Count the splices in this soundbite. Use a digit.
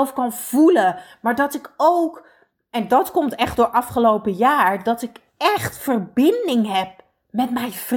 0